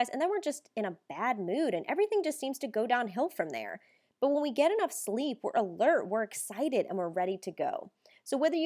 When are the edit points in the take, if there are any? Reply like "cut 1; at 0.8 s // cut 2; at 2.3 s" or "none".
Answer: none